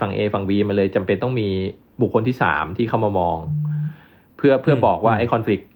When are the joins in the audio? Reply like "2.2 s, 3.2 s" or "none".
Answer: none